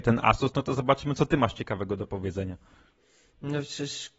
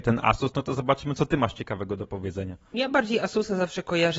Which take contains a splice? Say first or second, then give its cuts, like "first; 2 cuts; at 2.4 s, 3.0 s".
second; 1 cut; at 2.7 s